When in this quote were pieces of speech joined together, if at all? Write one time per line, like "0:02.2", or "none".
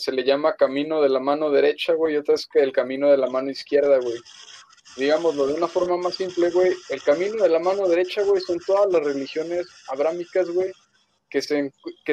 none